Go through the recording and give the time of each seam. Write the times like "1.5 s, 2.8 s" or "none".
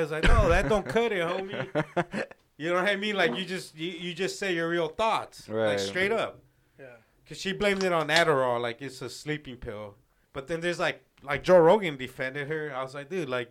10.3 s